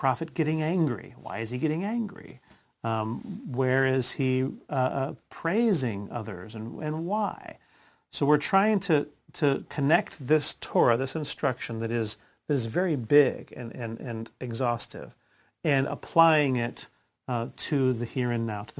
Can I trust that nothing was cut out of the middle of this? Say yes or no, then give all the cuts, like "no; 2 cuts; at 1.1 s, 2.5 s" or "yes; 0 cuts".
yes; 0 cuts